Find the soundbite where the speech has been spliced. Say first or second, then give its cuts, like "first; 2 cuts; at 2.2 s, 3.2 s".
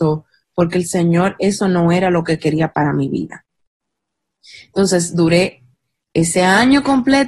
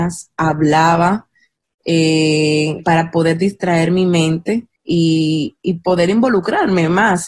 second; 2 cuts; at 2.8 s, 4.7 s